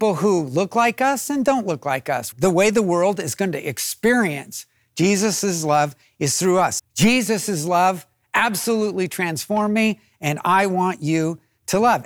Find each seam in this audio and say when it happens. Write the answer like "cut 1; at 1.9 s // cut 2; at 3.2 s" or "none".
cut 1; at 2.3 s // cut 2; at 6.8 s

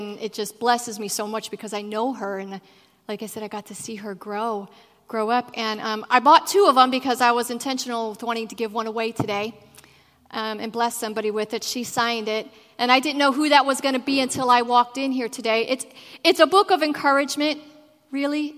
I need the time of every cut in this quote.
none

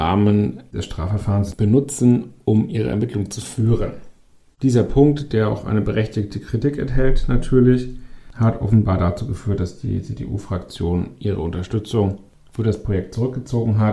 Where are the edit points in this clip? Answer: none

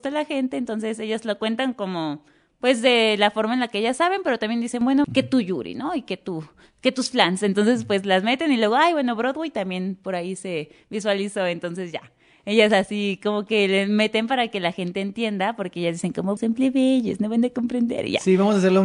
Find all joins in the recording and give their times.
cut 1; at 5.0 s // cut 2; at 16.4 s

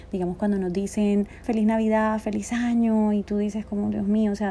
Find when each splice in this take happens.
cut 1; at 1.4 s

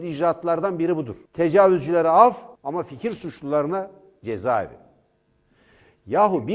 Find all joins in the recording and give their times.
cut 1; at 1.3 s // cut 2; at 2.6 s

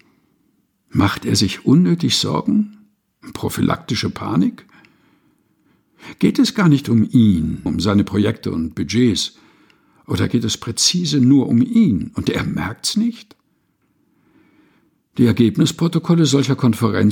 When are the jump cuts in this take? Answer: cut 1; at 7.7 s

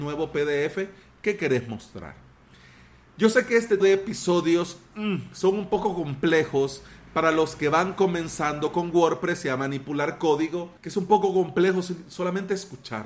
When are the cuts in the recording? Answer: cut 1; at 3.8 s // cut 2; at 10.8 s

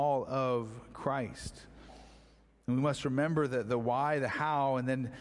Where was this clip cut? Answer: none

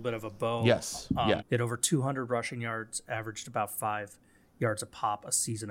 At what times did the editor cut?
cut 1; at 1.4 s

